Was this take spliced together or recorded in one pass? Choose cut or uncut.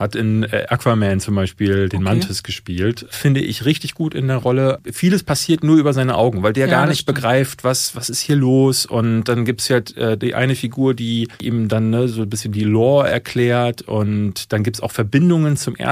uncut